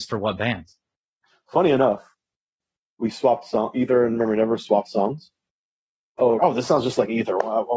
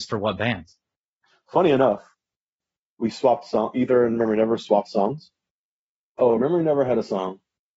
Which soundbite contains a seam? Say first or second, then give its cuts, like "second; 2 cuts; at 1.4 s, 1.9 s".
first; 1 cut; at 6.4 s